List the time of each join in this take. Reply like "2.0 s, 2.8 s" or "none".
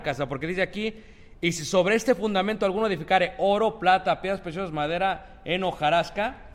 none